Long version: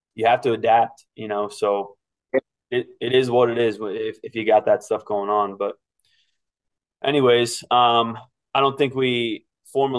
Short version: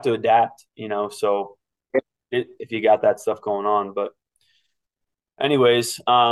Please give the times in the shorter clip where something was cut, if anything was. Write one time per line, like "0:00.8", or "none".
0:02.6